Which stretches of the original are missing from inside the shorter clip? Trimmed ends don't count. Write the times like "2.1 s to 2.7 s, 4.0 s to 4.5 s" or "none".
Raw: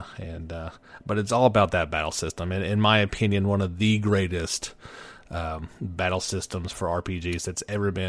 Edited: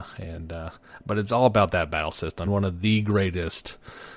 2.5 s to 3.4 s